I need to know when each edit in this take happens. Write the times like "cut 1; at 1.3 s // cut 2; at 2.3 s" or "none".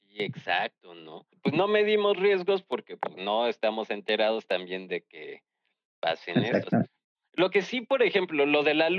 none